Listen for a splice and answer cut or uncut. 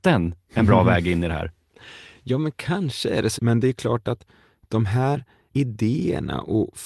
cut